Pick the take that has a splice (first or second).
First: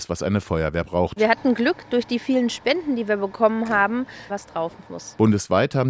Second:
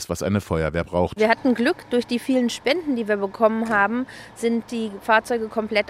first